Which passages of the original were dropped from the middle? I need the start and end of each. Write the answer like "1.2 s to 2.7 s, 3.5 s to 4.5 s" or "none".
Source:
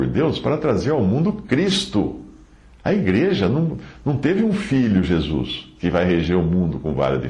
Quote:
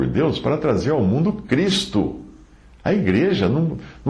none